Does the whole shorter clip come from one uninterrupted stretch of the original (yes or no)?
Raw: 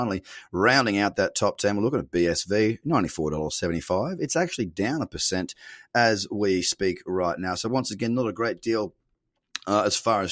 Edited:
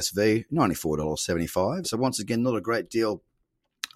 no